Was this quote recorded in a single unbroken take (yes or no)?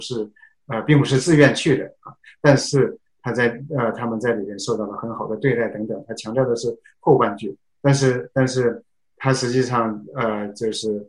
yes